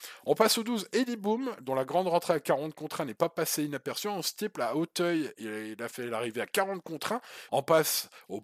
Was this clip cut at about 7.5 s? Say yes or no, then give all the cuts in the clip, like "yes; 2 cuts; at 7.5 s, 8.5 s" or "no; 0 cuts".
yes; 1 cut; at 7.5 s